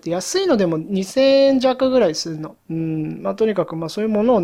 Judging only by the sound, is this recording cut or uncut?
cut